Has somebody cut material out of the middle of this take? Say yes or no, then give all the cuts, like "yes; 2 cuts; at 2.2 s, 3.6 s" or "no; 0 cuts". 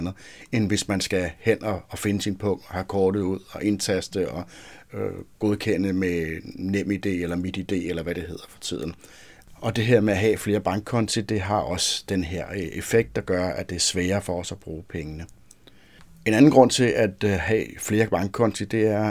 no; 0 cuts